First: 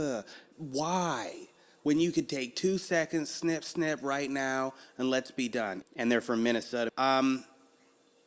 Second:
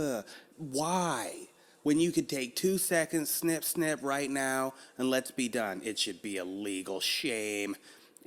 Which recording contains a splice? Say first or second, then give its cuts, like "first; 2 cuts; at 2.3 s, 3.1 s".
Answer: first; 2 cuts; at 5.8 s, 6.9 s